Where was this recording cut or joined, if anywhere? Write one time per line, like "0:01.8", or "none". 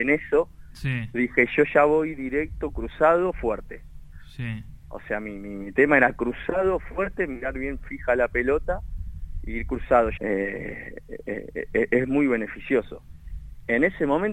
0:10.2
0:12.0